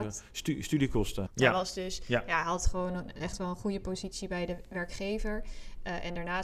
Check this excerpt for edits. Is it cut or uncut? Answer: cut